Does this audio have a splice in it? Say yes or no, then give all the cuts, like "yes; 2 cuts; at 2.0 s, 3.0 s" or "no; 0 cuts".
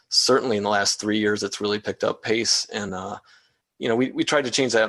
no; 0 cuts